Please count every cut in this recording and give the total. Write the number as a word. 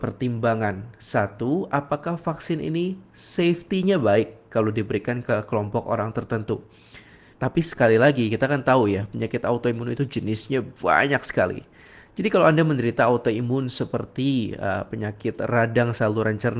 one